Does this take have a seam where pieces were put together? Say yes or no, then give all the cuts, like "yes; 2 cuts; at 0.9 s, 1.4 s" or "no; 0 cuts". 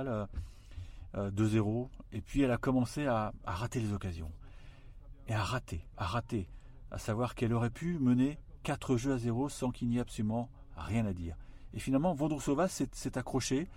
no; 0 cuts